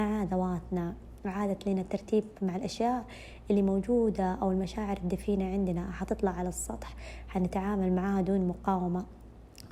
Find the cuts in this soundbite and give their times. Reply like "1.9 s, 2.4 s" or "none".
2.4 s